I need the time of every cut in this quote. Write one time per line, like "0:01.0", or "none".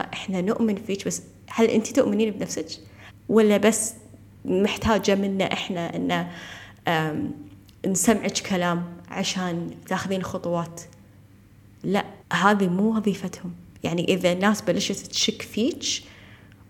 0:03.1
0:12.2